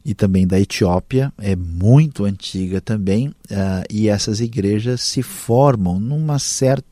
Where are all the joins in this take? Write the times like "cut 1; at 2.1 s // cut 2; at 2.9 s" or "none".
none